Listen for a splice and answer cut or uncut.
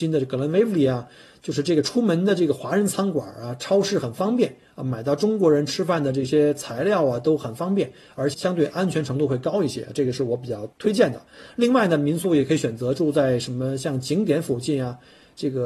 cut